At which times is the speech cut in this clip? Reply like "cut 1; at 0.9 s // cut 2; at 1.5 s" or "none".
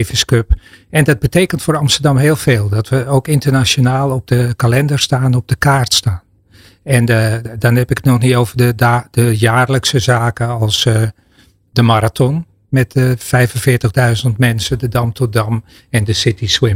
none